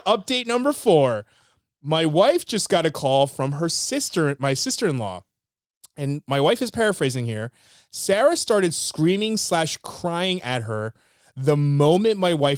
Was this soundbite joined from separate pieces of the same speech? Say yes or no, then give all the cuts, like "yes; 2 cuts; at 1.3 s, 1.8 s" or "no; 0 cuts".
no; 0 cuts